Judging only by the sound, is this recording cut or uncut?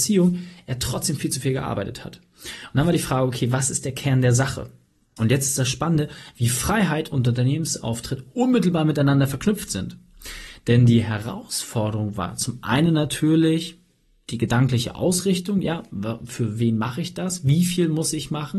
uncut